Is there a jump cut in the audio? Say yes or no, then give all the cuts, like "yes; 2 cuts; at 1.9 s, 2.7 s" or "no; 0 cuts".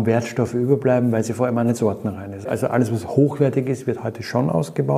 no; 0 cuts